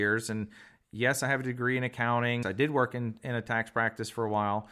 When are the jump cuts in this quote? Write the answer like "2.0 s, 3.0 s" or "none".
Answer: 2.4 s